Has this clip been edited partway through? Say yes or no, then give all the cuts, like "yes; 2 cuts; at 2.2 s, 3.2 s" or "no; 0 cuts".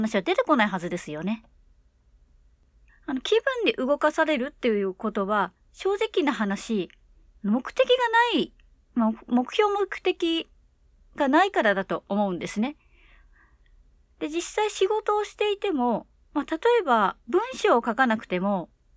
yes; 1 cut; at 2.9 s